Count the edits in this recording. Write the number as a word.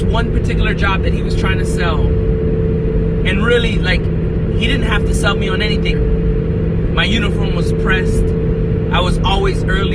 two